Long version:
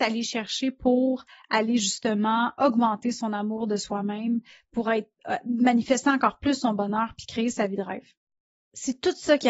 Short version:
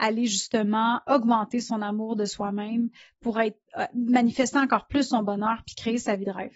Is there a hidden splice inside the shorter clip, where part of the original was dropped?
no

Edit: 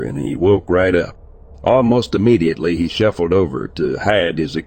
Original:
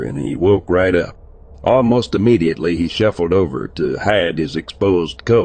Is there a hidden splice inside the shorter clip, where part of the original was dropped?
no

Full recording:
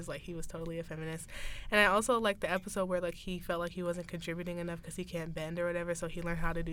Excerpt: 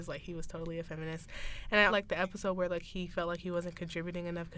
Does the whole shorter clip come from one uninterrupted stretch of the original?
no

